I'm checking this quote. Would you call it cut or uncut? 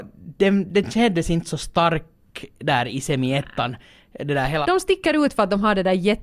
cut